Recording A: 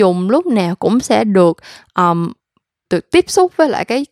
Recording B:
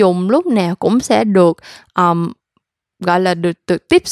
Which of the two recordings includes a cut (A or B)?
A